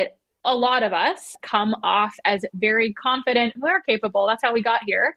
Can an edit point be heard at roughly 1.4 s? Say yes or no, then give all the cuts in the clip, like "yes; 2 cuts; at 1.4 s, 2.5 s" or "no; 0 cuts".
yes; 2 cuts; at 1.4 s, 3.6 s